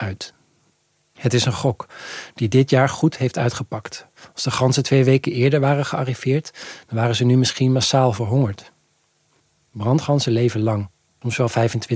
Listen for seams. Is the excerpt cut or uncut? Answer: uncut